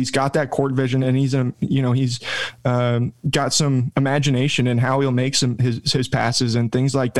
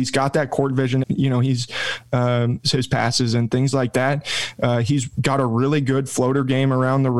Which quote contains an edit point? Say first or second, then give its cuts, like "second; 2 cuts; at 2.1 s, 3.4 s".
second; 2 cuts; at 1.0 s, 2.6 s